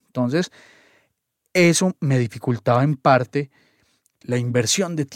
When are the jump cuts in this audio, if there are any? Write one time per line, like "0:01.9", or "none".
0:04.2